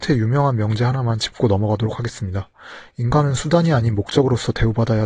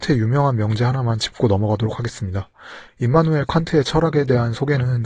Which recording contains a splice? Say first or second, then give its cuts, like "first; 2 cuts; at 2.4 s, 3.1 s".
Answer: second; 1 cut; at 2.9 s